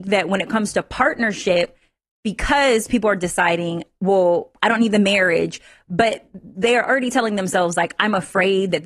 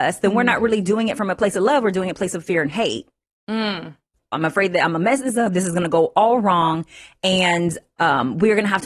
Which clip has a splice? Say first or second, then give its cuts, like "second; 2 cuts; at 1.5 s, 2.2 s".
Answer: second; 1 cut; at 4.3 s